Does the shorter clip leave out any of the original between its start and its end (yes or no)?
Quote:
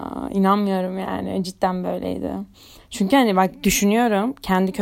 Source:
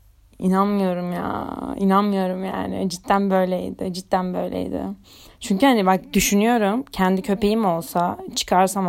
yes